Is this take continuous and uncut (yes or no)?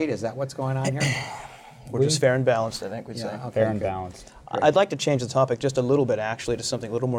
yes